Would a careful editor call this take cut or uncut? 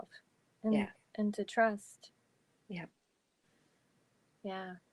uncut